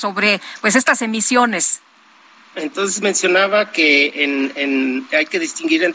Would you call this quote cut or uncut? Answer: cut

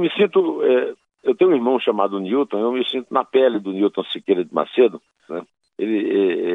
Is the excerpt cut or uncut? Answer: cut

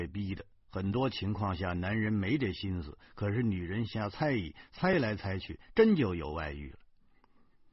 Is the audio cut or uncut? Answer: uncut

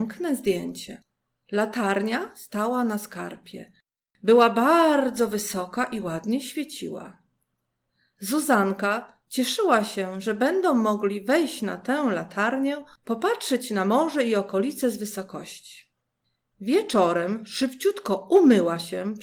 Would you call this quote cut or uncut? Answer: uncut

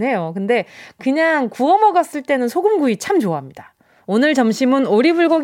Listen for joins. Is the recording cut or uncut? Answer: cut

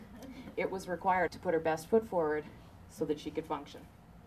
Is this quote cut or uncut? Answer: cut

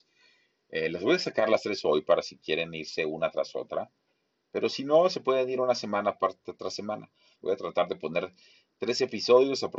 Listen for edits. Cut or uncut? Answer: cut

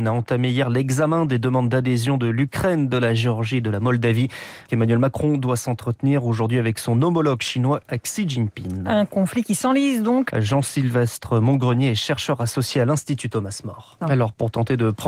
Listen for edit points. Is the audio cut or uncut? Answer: cut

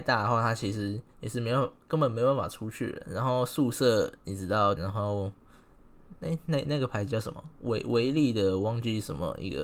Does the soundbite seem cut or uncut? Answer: cut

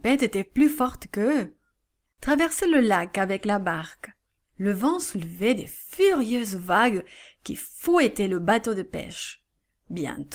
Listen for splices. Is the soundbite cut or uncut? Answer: cut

